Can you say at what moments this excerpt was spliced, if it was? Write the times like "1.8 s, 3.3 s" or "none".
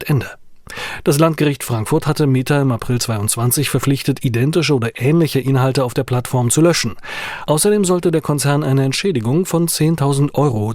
none